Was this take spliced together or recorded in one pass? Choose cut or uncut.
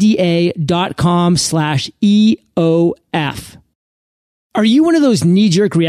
uncut